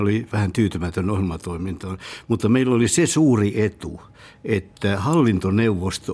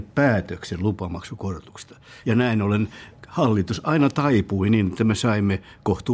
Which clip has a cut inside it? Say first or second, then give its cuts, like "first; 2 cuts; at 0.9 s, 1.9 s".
second; 1 cut; at 2.2 s